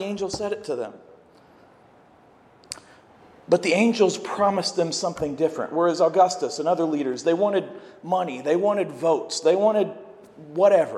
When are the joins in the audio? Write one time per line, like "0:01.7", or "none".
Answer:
none